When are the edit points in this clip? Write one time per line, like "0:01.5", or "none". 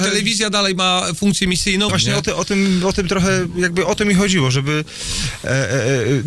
0:01.9